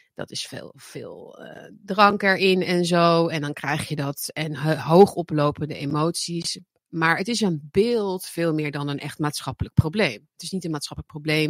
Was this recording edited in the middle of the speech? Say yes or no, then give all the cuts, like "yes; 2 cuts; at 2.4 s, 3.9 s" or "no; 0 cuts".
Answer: no; 0 cuts